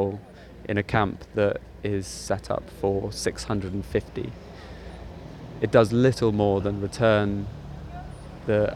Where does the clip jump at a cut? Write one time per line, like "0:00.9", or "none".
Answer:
none